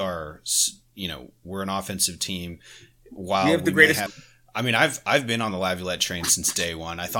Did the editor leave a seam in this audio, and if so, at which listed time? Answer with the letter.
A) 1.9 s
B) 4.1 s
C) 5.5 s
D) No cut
B